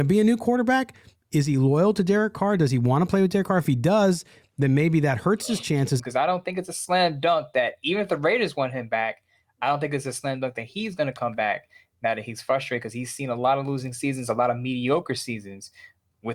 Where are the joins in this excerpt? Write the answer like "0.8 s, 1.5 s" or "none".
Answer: 6.0 s